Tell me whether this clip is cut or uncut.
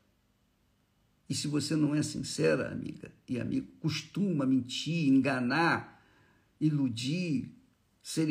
uncut